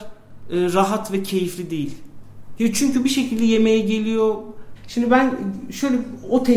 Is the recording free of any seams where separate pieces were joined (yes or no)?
no